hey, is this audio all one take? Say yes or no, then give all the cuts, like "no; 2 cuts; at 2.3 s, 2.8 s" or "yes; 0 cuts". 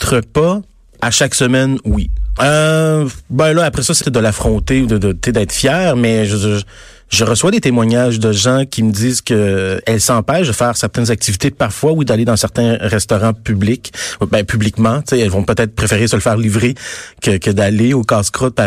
no; 2 cuts; at 2.4 s, 4.0 s